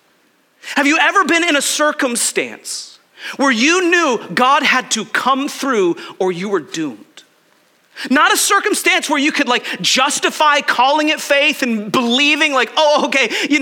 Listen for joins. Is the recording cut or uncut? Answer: uncut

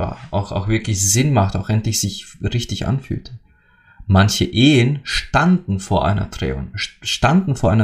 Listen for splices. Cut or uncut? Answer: uncut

